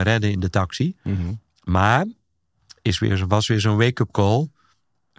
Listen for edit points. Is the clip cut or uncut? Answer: uncut